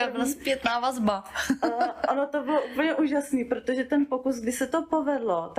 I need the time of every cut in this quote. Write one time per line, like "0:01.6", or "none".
none